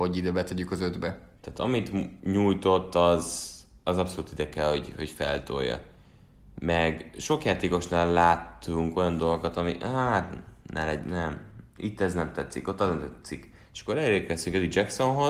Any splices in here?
yes; 1 cut; at 1.4 s

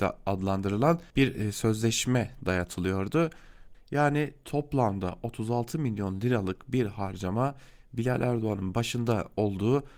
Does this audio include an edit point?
yes; 2 cuts; at 1.1 s, 3.7 s

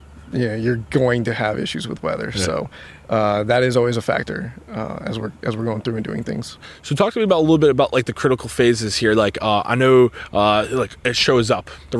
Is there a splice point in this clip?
no; 0 cuts

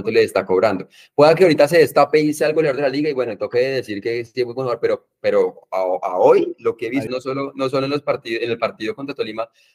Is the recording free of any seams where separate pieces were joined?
no; 1 cut; at 7.1 s

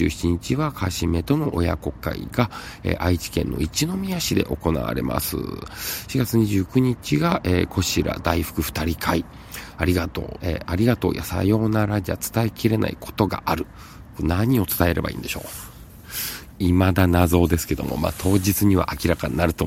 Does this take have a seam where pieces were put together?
yes; 1 cut; at 10.4 s

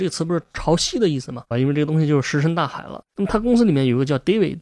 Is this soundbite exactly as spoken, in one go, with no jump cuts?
no; 2 cuts; at 1.5 s, 3.1 s

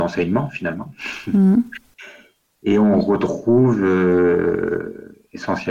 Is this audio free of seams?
yes; 0 cuts

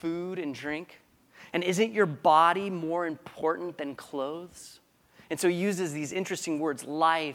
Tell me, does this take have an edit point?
no; 0 cuts

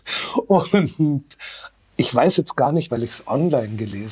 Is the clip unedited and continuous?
no; 1 cut; at 2.9 s

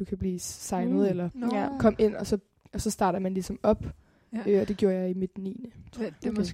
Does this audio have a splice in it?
no; 0 cuts

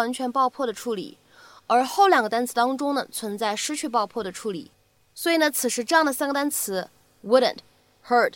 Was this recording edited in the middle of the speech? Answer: no; 0 cuts

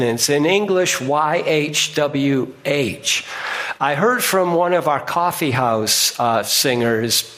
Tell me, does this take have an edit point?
no; 0 cuts

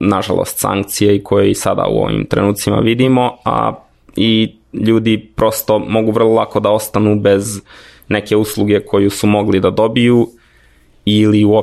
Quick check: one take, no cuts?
yes; 0 cuts

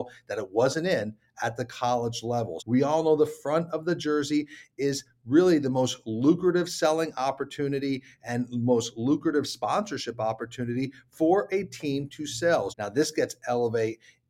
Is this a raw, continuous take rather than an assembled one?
no; 2 cuts; at 2.6 s, 12.7 s

